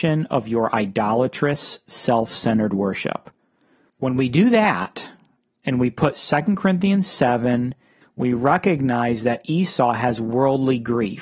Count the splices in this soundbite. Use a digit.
2